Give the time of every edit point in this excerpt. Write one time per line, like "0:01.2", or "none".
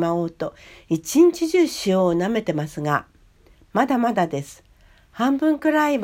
none